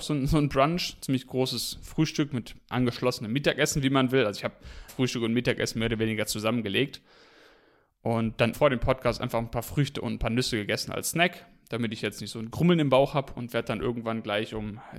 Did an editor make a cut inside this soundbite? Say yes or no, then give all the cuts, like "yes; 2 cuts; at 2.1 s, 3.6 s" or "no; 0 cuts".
yes; 2 cuts; at 4.9 s, 8.5 s